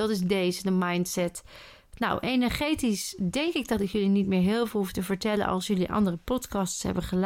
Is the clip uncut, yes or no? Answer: yes